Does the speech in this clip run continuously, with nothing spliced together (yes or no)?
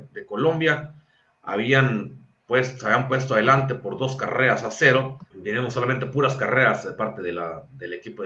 no